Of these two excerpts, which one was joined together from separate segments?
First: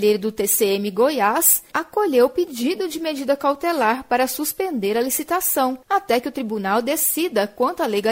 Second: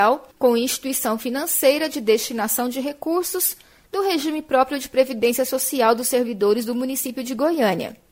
first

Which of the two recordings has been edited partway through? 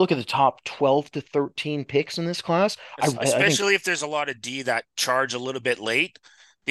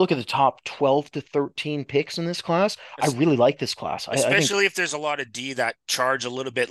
first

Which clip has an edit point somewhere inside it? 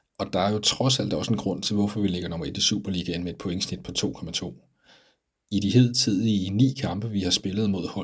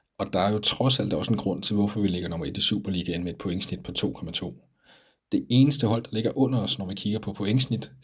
second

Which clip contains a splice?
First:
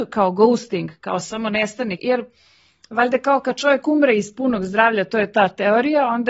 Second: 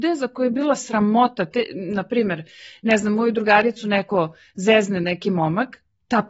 first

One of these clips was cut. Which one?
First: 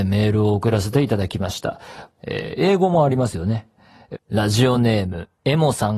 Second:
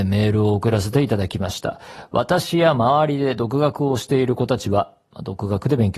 first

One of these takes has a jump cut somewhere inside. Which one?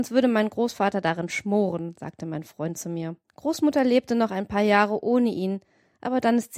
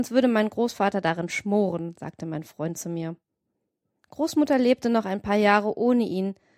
first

